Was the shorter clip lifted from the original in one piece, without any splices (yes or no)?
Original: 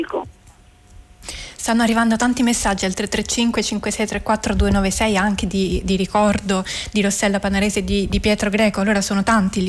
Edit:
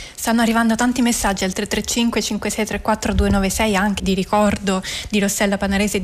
no